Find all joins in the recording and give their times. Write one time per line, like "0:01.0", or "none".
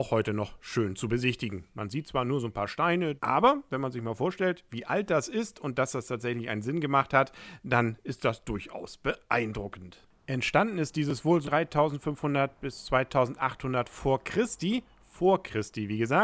0:03.2
0:11.4